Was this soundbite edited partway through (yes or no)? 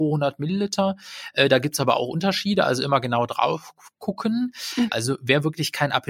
yes